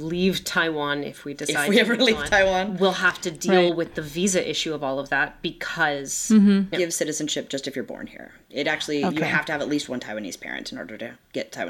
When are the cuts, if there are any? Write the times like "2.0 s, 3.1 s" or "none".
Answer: 6.7 s